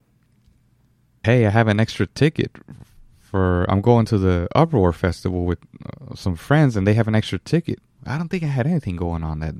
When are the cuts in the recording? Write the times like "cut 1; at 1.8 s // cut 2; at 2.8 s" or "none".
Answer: cut 1; at 1.2 s // cut 2; at 8.0 s